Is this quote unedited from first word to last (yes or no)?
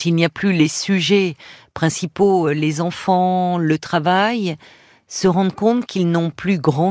yes